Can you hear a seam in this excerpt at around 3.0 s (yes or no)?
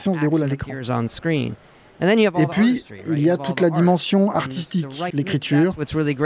no